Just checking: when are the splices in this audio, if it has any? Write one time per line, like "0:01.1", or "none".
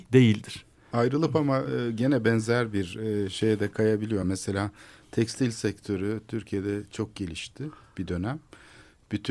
none